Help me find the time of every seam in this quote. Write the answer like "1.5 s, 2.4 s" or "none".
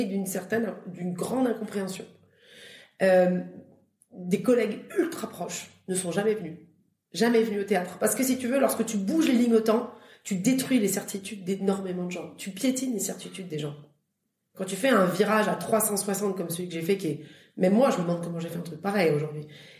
none